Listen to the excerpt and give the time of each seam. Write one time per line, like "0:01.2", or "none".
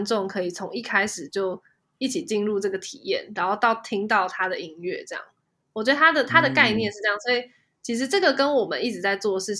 none